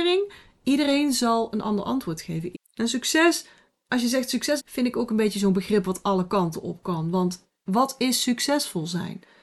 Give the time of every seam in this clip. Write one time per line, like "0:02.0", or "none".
0:02.5
0:04.6